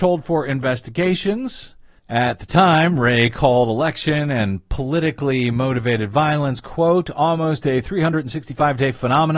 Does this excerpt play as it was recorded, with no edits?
no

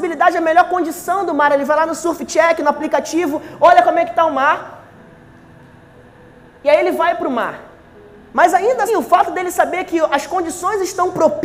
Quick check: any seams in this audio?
yes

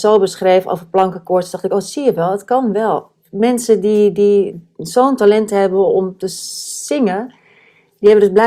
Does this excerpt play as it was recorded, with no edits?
yes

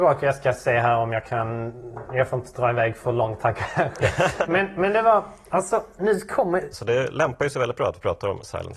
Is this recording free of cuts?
no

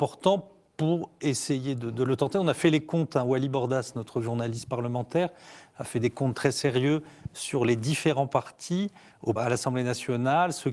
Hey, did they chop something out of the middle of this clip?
yes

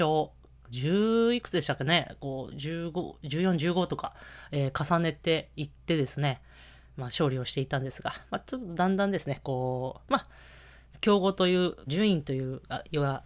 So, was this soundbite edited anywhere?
yes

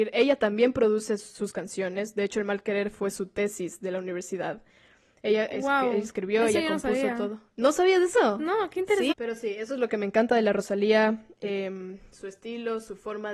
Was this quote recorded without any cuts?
no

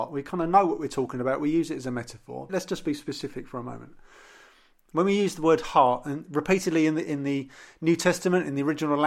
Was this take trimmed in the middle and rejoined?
yes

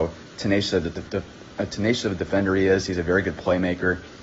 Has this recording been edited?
no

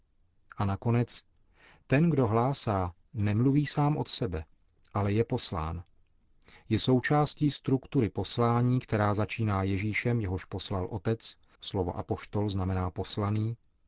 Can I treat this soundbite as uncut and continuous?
no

